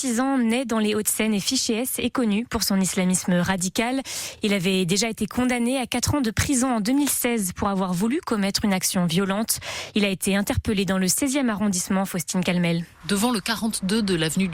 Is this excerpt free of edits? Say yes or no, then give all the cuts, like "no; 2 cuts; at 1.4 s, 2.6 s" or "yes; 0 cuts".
yes; 0 cuts